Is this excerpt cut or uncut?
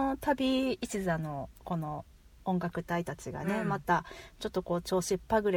uncut